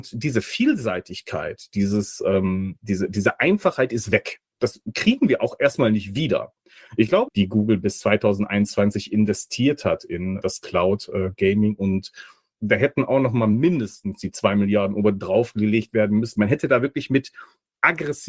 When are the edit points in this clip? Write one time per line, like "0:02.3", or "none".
0:07.3
0:10.4
0:12.6